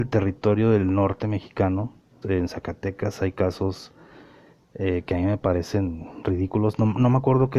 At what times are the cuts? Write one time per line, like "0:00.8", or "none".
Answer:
0:02.2